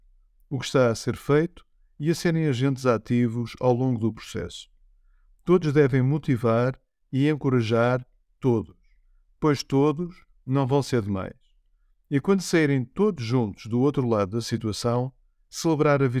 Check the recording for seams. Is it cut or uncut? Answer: uncut